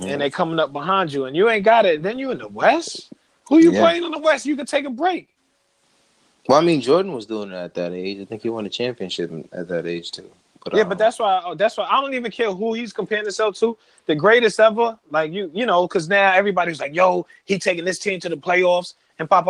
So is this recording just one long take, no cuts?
yes; 0 cuts

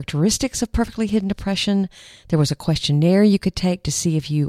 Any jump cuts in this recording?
no; 0 cuts

